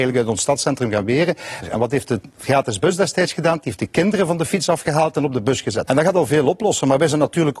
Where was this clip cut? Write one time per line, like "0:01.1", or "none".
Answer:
0:01.6
0:05.9